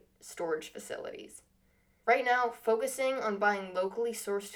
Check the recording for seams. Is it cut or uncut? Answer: cut